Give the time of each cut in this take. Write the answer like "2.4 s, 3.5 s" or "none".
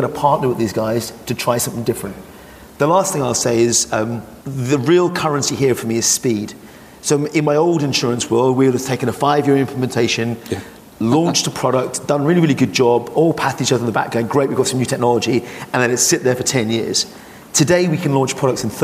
4.4 s